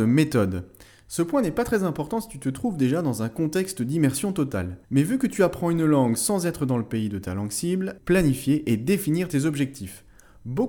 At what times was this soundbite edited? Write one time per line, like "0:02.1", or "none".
0:04.8
0:08.0